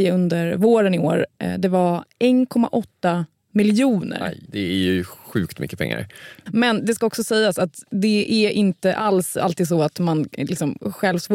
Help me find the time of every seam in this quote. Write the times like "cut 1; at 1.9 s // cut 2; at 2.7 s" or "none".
cut 1; at 4.5 s // cut 2; at 6.5 s